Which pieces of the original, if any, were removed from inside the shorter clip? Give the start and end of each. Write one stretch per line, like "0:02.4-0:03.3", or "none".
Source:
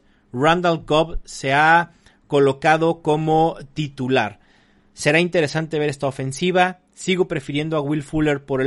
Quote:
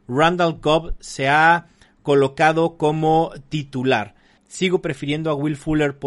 0:04.6-0:06.8